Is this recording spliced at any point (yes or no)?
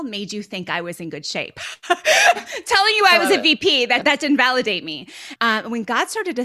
yes